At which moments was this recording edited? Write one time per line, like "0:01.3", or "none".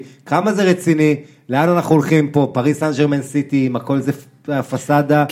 none